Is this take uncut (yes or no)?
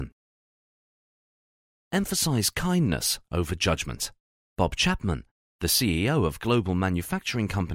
no